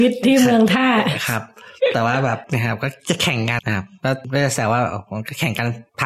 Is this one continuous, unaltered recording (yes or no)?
no